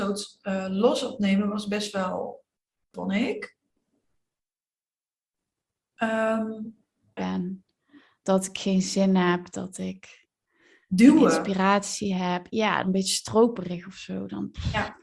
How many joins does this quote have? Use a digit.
3